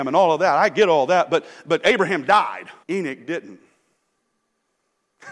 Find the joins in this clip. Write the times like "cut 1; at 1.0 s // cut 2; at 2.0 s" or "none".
cut 1; at 2.8 s